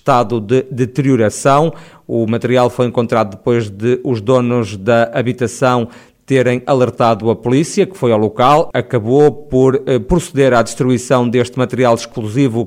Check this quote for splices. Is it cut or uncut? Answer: cut